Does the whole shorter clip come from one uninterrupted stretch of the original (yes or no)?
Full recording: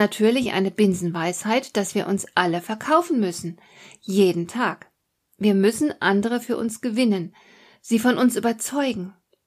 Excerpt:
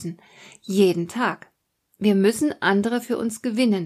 yes